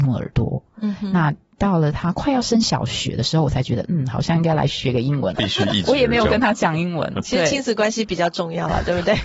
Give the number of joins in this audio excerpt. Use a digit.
1